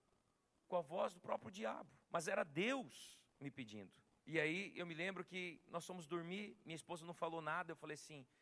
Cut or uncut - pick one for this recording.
cut